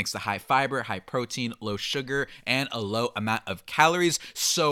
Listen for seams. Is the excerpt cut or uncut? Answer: uncut